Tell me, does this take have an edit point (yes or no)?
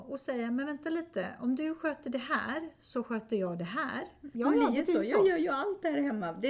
yes